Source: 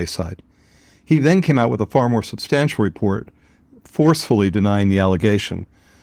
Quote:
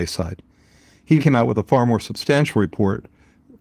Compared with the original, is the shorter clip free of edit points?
no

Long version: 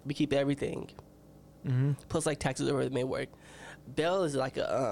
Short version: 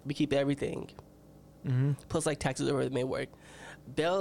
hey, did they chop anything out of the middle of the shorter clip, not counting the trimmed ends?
no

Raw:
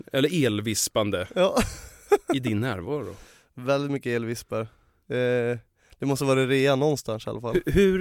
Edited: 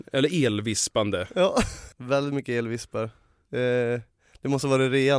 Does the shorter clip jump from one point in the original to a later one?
yes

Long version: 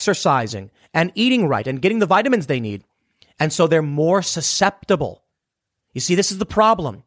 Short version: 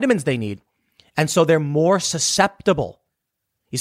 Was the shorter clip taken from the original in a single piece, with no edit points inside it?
yes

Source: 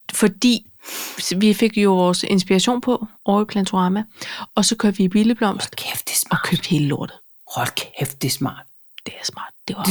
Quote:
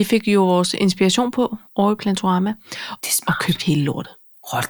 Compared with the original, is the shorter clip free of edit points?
no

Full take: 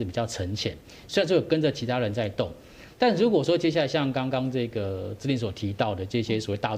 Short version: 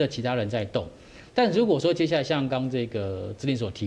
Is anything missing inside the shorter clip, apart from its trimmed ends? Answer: yes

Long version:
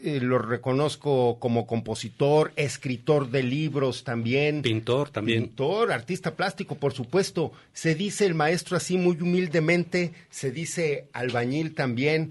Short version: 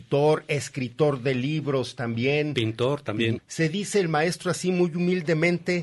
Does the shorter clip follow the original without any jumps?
no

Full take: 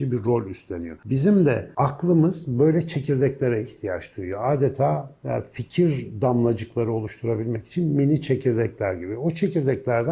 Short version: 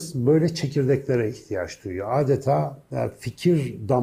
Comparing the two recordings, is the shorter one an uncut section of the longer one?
yes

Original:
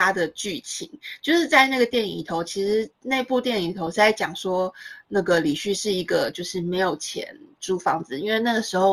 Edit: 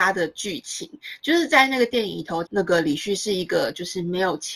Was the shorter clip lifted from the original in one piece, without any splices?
no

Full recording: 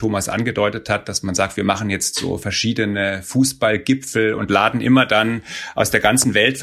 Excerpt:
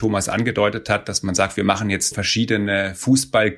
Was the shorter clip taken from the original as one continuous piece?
no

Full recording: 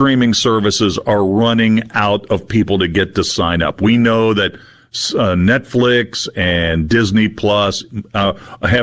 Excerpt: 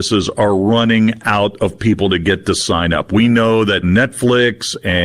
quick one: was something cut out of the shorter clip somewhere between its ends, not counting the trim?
yes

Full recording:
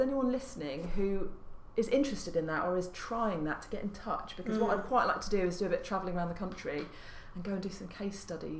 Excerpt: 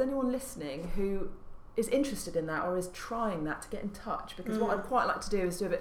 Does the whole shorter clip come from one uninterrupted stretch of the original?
yes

